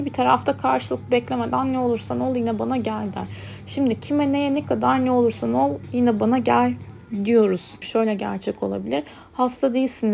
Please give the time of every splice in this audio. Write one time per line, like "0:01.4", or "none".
0:07.8